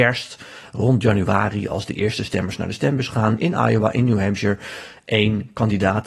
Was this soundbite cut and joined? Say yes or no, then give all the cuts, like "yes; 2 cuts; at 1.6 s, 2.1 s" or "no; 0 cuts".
no; 0 cuts